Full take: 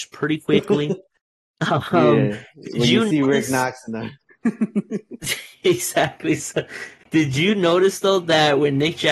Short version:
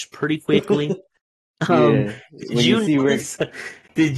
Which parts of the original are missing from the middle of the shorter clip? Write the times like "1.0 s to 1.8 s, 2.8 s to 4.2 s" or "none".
1.7 s to 1.9 s, 3.4 s to 6.4 s